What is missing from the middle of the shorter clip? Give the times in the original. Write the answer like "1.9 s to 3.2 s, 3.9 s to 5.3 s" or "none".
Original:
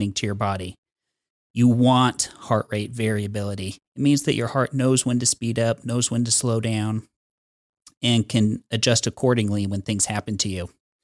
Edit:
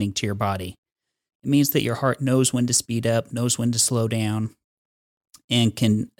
1.3 s to 3.8 s